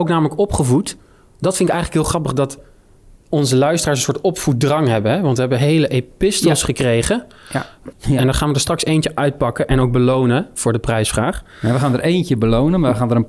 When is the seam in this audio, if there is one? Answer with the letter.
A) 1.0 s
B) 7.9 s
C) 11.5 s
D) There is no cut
B